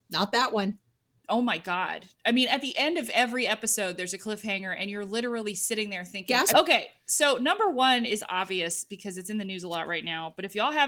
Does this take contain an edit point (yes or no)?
yes